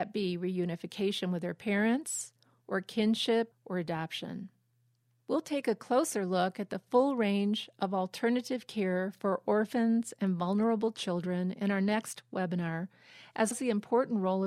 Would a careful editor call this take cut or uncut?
cut